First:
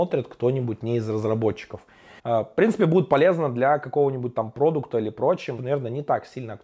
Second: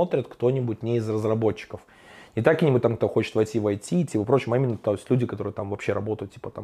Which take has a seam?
first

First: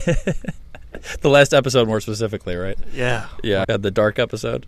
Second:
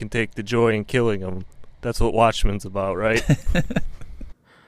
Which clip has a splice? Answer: first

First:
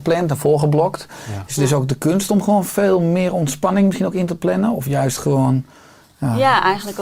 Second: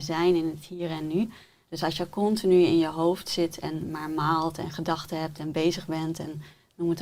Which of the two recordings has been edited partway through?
second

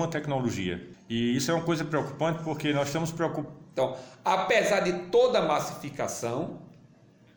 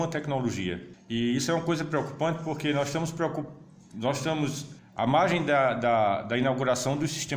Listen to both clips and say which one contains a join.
first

